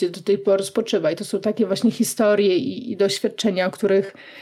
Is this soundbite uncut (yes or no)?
yes